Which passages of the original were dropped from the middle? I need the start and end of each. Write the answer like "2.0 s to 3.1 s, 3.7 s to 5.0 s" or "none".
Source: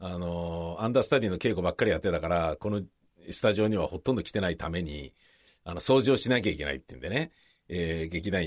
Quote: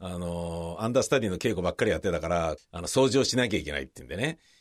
2.6 s to 5.5 s